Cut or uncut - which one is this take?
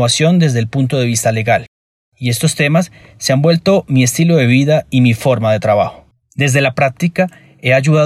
uncut